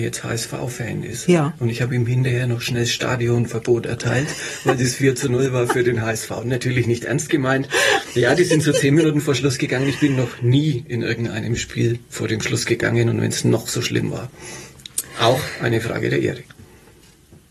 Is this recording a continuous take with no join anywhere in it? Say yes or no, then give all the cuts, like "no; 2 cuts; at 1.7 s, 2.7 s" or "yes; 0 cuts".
yes; 0 cuts